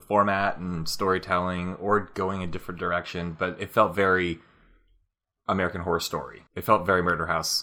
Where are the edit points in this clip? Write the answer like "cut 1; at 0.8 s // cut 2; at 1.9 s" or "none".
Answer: cut 1; at 6.5 s